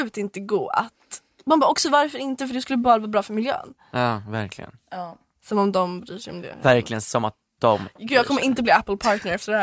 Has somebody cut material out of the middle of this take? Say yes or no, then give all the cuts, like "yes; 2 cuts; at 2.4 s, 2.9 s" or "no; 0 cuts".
no; 0 cuts